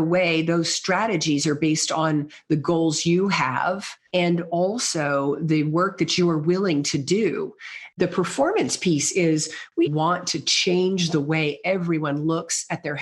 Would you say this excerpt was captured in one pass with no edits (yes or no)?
no